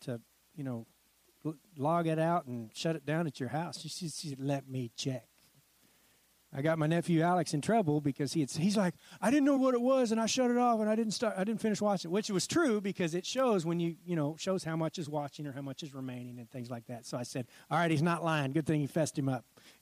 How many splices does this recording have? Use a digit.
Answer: 1